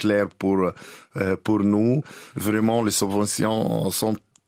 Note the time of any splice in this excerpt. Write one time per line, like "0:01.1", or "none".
0:02.3